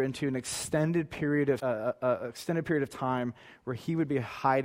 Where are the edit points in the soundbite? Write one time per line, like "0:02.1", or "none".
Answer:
0:01.6